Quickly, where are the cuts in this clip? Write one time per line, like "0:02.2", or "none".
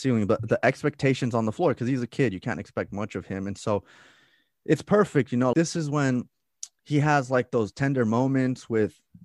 0:05.5